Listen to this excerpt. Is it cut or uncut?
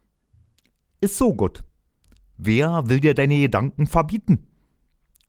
uncut